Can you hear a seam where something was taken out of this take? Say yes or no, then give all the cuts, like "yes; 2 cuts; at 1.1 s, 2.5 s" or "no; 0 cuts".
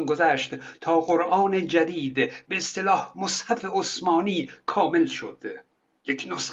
no; 0 cuts